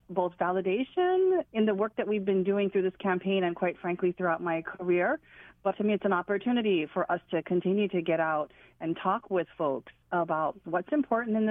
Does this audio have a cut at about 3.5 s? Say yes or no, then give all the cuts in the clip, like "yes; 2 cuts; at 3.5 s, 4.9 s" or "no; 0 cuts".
no; 1 cut; at 5.7 s